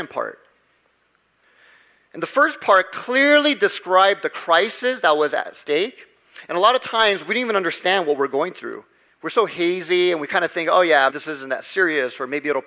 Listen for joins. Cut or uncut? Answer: cut